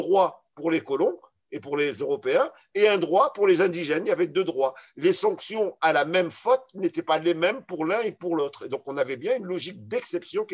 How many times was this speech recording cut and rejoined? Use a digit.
0